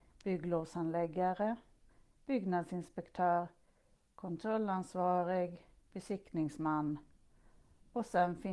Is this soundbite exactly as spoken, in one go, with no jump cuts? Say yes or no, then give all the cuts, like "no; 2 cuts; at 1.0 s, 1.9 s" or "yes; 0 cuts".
yes; 0 cuts